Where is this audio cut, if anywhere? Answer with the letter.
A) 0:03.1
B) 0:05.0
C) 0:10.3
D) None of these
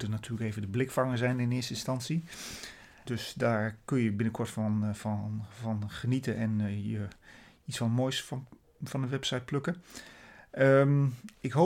A